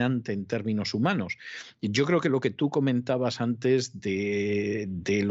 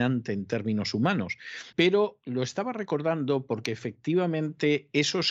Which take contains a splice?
second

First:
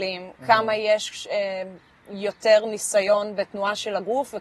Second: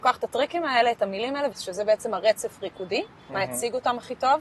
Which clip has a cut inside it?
second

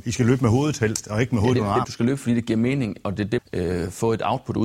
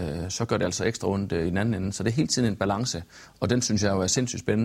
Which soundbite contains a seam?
first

